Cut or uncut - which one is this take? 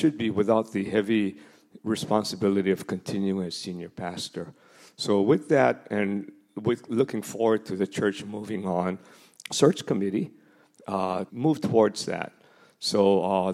cut